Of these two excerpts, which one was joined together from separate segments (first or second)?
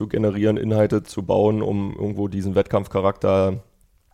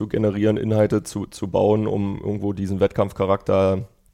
first